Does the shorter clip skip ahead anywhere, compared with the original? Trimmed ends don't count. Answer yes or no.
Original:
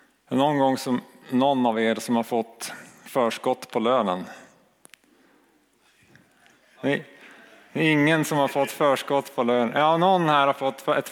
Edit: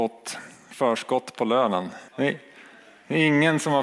yes